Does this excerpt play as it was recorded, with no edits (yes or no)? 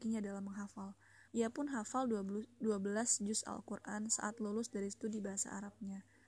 no